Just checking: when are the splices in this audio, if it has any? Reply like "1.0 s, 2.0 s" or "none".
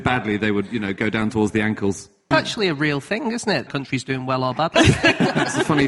2.3 s, 3.7 s, 4.7 s